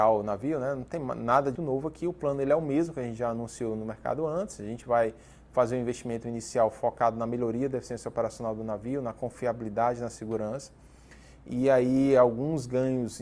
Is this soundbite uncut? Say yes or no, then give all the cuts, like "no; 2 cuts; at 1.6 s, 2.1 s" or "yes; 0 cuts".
no; 1 cut; at 1.6 s